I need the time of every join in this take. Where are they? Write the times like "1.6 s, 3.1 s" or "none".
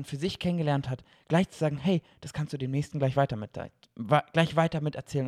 none